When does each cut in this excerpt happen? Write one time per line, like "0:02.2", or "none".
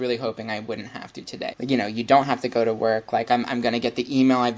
0:01.5